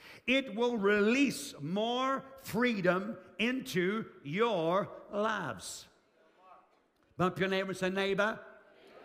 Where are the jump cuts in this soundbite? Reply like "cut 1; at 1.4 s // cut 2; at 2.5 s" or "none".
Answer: none